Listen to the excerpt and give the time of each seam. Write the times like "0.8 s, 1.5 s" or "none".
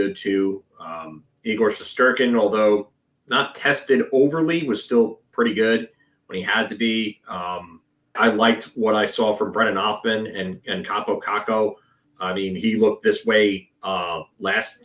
8.1 s, 12.0 s